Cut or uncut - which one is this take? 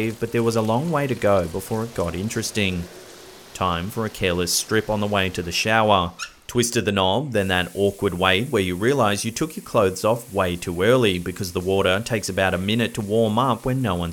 uncut